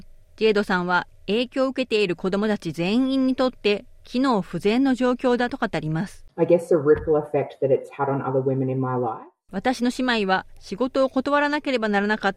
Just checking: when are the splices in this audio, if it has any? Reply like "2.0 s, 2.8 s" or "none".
none